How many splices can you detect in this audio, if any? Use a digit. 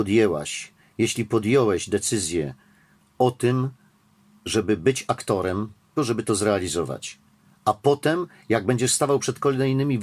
1